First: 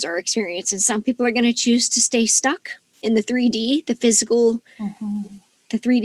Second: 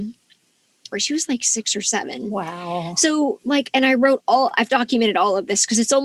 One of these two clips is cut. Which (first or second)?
second